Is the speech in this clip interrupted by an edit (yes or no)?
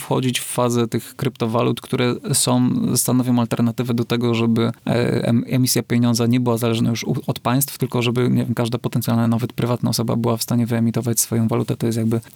no